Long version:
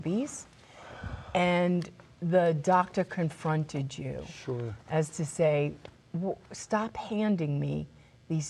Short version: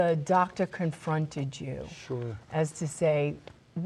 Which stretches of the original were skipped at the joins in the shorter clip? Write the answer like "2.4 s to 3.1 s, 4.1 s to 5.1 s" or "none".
none